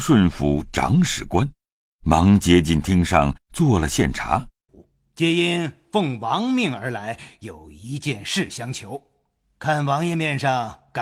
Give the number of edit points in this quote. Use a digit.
1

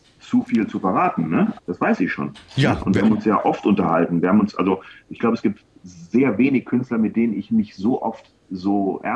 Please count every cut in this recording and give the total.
1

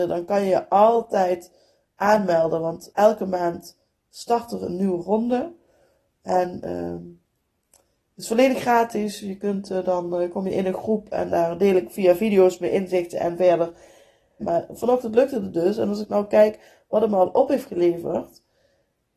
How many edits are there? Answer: 2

